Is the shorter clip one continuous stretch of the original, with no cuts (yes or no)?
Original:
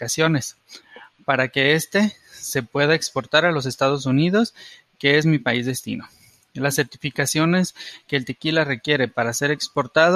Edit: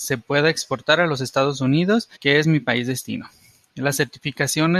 no